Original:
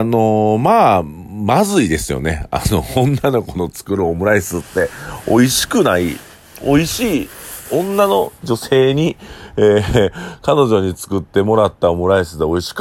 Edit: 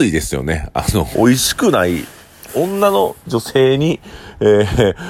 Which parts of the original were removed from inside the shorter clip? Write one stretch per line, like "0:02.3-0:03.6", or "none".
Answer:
0:02.9-0:05.2
0:06.6-0:07.6